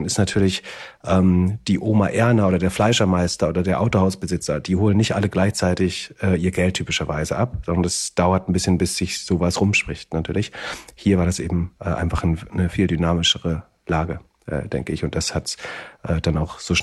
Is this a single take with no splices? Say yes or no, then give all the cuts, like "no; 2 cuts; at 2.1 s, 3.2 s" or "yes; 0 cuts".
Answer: yes; 0 cuts